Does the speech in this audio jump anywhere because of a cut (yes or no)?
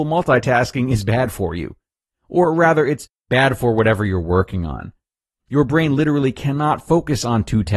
no